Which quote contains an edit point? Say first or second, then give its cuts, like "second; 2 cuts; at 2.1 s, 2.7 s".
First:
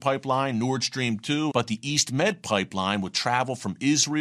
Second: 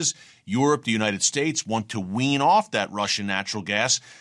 first; 1 cut; at 1.5 s